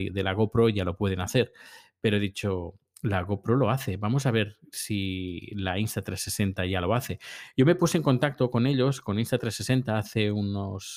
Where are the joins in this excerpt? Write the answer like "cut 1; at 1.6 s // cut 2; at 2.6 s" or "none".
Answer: none